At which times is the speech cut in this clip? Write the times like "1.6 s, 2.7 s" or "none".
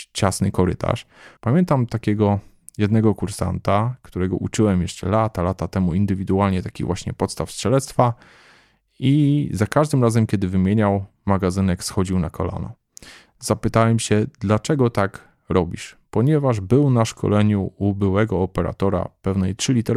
1.4 s